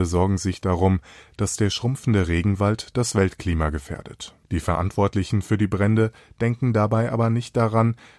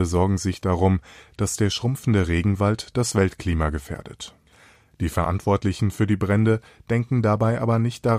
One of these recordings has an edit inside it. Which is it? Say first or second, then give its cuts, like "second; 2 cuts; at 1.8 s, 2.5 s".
first; 1 cut; at 4.4 s